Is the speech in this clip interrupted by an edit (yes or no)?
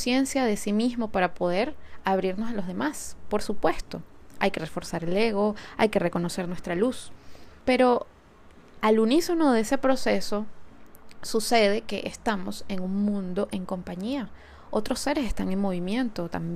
yes